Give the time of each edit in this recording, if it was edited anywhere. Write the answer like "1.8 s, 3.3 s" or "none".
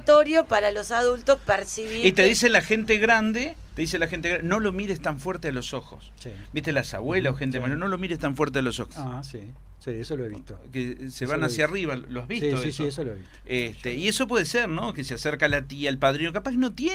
8.9 s